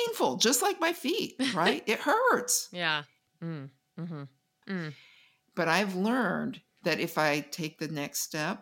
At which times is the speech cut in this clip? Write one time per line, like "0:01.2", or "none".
0:03.3
0:04.6
0:06.7